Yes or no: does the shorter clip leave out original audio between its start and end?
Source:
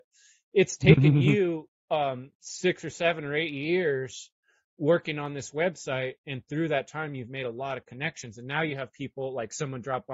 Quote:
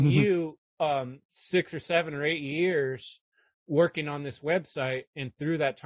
no